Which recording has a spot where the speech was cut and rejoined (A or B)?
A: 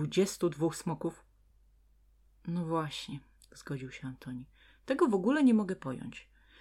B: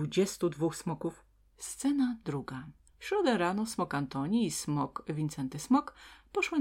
B